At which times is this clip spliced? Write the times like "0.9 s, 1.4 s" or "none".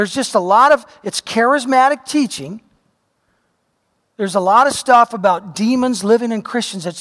none